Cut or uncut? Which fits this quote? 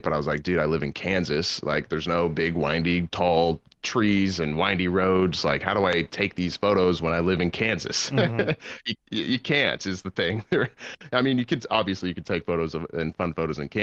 uncut